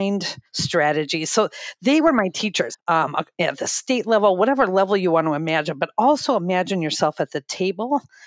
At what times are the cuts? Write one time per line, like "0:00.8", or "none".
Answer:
0:02.7